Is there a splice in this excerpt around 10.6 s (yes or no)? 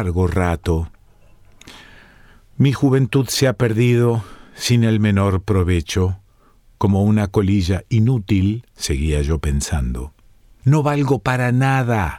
yes